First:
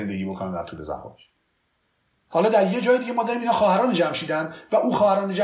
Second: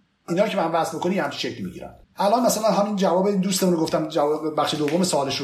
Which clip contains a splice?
second; 1 cut; at 2.0 s

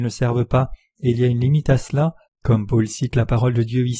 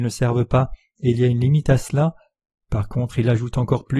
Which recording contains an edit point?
first; 1 cut; at 2.2 s

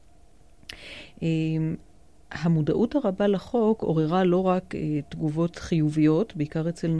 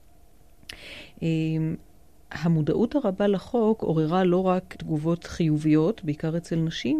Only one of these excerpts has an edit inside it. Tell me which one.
second; 1 cut; at 4.7 s

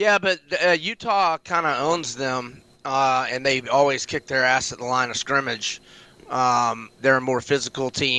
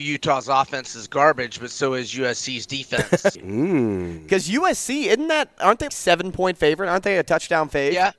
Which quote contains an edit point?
second; 2 cuts; at 3.4 s, 5.9 s

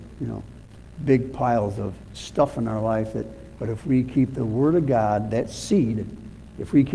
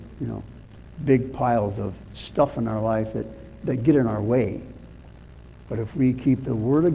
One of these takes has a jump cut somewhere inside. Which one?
first; 1 cut; at 3.6 s

